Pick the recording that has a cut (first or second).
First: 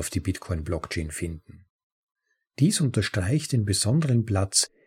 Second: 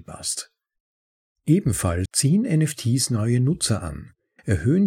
second